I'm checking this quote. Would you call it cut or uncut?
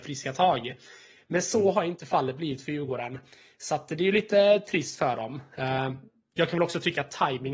uncut